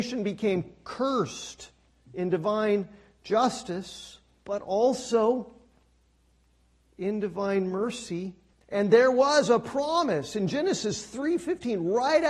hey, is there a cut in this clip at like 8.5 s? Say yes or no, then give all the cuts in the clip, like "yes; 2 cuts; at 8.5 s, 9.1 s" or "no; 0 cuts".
yes; 1 cut; at 8.5 s